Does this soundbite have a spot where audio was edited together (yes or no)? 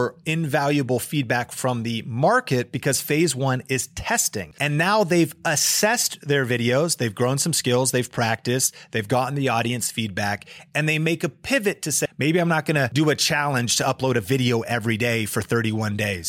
yes